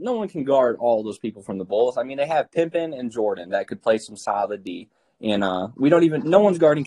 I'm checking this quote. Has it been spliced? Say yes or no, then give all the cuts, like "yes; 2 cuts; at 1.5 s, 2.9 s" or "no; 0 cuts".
no; 0 cuts